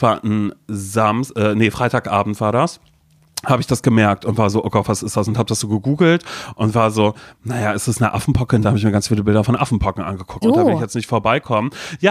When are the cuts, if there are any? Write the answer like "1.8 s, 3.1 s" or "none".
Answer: 8.6 s, 10.4 s